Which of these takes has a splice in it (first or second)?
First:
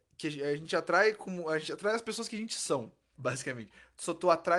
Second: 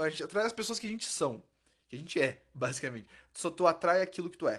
first